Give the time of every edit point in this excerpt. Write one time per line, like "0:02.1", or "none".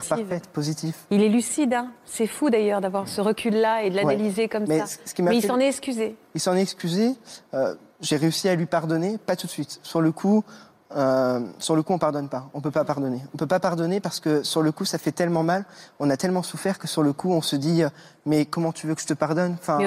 none